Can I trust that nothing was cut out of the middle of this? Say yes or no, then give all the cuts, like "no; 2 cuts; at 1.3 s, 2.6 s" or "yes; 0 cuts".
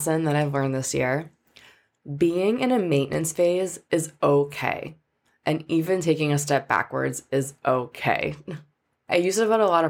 yes; 0 cuts